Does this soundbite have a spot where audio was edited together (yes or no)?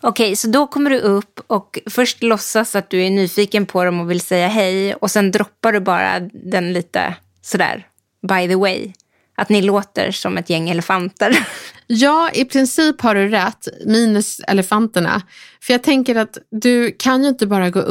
no